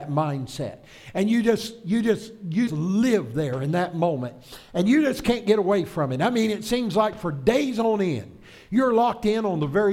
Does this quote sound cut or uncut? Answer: cut